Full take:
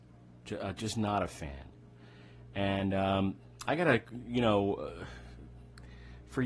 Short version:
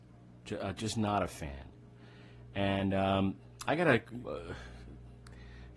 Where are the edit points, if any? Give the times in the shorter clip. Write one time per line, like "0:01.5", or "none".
0:04.2